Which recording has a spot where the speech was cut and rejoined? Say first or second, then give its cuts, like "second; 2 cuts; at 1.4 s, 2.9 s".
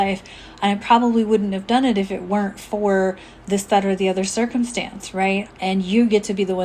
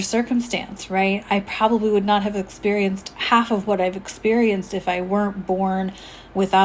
first; 1 cut; at 5.5 s